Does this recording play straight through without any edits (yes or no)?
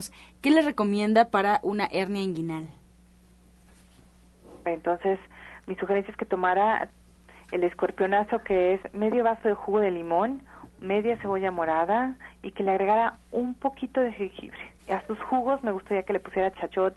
no